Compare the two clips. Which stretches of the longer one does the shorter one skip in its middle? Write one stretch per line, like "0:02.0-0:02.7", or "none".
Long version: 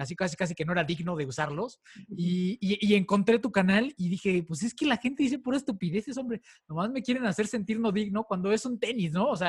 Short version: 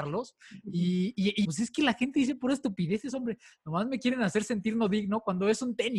0:02.9-0:04.5